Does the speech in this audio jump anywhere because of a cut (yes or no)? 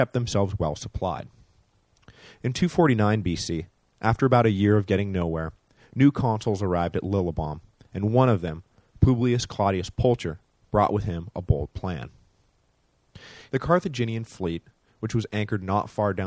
yes